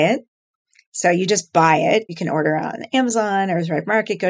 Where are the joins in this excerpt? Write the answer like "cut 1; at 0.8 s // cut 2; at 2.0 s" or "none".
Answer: cut 1; at 2.1 s